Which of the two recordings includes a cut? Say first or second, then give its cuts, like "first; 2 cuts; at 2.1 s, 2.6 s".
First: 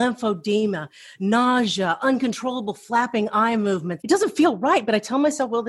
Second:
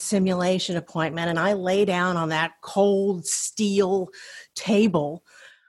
first; 1 cut; at 4.0 s